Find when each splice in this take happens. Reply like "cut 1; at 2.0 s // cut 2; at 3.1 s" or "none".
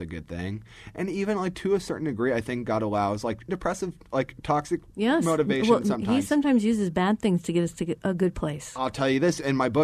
cut 1; at 3.5 s